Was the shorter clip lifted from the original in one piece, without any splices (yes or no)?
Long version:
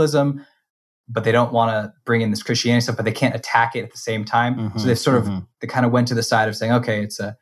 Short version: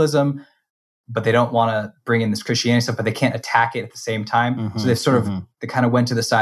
yes